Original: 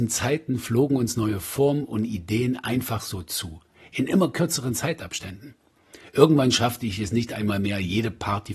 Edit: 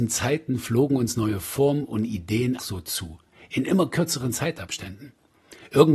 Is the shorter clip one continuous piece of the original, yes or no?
no